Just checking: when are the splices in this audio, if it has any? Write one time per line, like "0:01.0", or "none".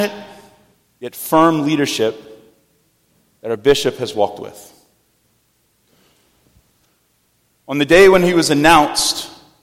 none

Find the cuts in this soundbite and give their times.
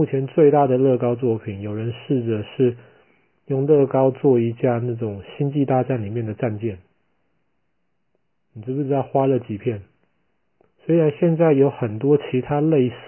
0:10.6

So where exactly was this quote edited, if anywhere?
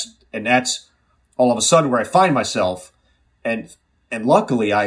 none

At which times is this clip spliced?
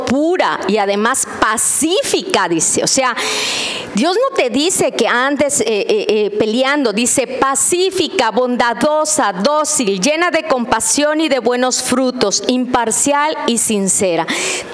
none

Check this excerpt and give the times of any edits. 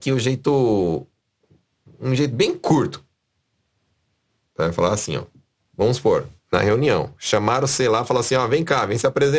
0:04.4
0:06.4

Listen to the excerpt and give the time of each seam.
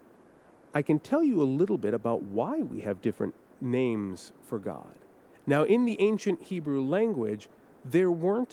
0:05.4

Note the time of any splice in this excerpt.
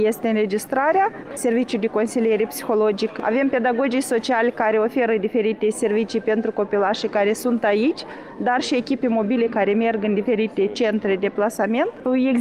0:01.3

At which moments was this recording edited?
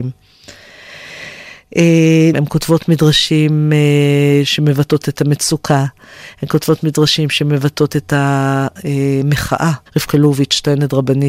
0:02.3
0:09.9

